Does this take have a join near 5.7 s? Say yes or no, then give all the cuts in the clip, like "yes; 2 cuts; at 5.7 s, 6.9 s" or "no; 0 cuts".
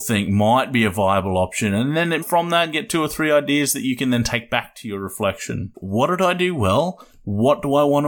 yes; 2 cuts; at 2.2 s, 5.7 s